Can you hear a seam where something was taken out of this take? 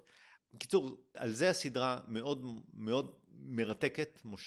yes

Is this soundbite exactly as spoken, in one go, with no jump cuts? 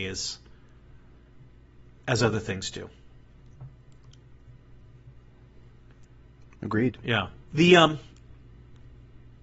no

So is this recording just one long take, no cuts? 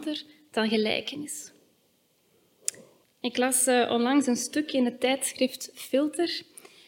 no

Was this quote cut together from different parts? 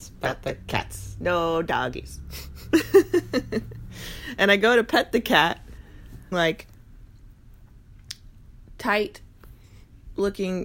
yes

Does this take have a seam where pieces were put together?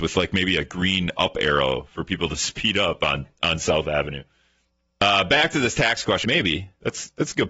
yes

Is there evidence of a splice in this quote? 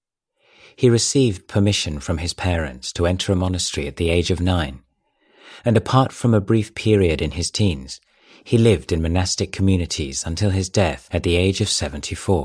no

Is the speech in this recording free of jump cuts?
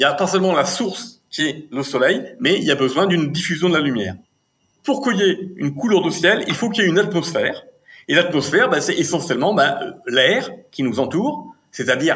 yes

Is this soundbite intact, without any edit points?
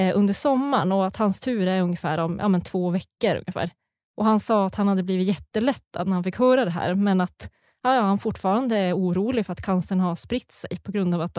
yes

